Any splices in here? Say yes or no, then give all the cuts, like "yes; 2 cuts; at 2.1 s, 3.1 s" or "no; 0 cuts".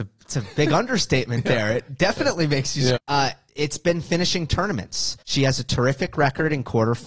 yes; 2 cuts; at 3.0 s, 5.2 s